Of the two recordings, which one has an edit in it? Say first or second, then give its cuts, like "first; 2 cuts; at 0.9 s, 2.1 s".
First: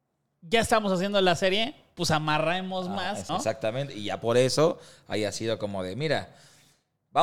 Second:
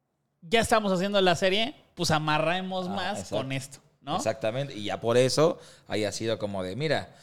first; 1 cut; at 3.3 s